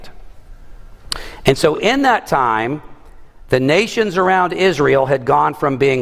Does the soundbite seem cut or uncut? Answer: uncut